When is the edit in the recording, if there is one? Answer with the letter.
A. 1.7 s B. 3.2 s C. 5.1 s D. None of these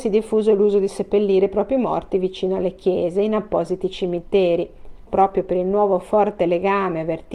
C